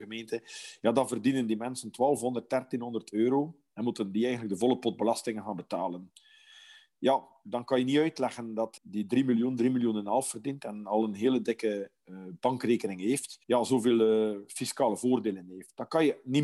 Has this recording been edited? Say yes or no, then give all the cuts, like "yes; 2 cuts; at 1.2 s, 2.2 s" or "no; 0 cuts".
yes; 2 cuts; at 8.8 s, 13.4 s